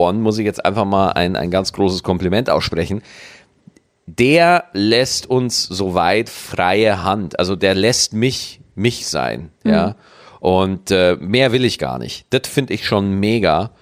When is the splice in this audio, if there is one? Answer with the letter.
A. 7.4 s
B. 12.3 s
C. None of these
C